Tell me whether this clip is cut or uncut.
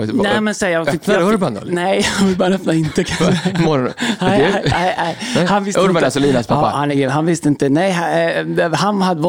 uncut